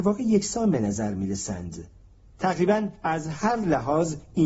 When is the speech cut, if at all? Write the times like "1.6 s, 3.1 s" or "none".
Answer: none